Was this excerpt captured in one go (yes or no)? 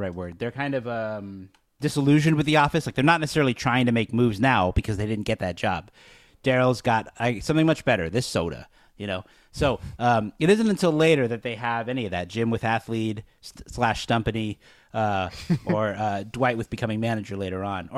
yes